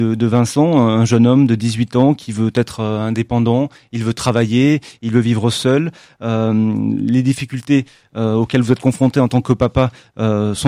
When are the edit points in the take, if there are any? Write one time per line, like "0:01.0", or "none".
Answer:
none